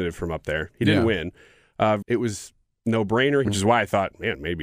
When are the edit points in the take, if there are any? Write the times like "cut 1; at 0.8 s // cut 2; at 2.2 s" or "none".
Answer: cut 1; at 2.0 s // cut 2; at 3.4 s